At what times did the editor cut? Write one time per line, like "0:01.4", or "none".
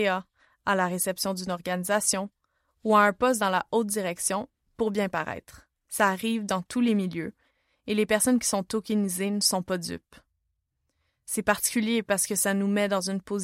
0:05.9